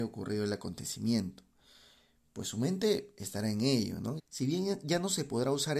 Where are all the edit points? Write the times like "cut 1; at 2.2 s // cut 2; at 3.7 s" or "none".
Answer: cut 1; at 4.2 s